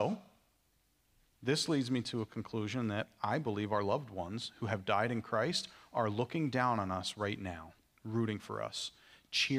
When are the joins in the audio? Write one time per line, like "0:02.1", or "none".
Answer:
none